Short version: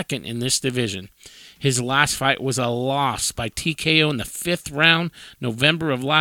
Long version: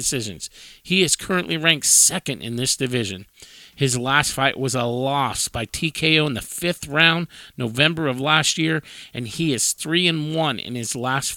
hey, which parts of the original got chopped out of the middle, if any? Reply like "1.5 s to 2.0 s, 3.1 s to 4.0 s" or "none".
none